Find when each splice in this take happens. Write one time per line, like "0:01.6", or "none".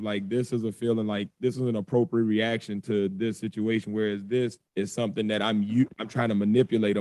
0:04.7